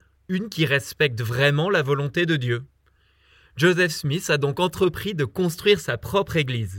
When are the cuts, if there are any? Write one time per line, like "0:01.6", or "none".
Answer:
none